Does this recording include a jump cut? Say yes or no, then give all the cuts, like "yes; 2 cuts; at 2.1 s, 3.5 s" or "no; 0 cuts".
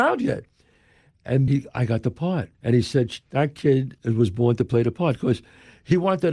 yes; 2 cuts; at 1.5 s, 2.5 s